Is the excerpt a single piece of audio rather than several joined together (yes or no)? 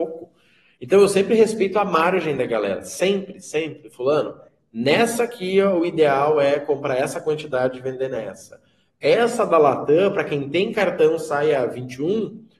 yes